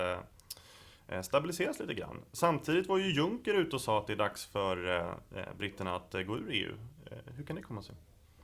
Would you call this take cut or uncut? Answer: uncut